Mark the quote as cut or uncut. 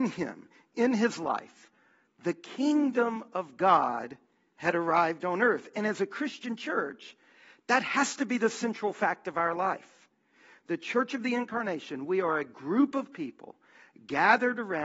uncut